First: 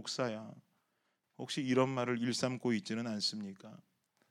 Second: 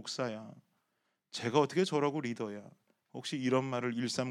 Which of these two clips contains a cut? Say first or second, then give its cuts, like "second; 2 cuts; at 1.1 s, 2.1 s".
first; 1 cut; at 1.2 s